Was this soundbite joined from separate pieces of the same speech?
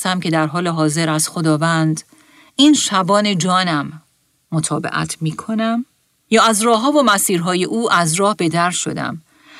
no; 0 cuts

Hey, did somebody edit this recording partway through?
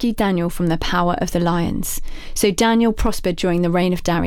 no; 0 cuts

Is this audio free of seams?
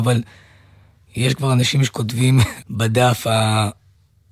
no; 1 cut; at 2.6 s

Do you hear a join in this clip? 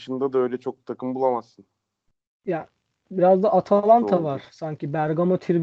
yes; 1 cut; at 3.0 s

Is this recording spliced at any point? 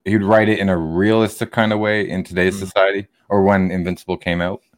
no; 0 cuts

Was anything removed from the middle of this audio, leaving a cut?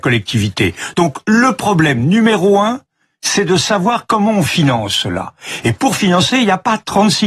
no; 0 cuts

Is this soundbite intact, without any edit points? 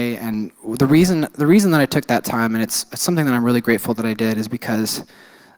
yes; 0 cuts

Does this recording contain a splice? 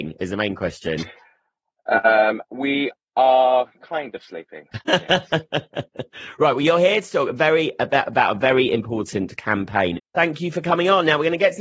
yes; 1 cut; at 10.0 s

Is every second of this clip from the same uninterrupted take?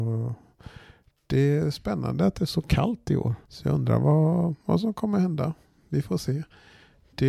no; 1 cut; at 3.4 s

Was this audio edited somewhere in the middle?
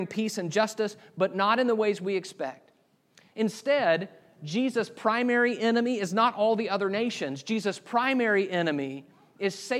no; 0 cuts

